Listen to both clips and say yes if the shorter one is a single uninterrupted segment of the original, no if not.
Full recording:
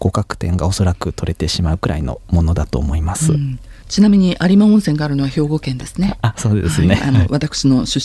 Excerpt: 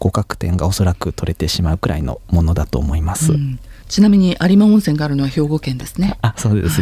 yes